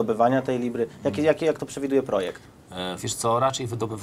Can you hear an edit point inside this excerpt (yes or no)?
no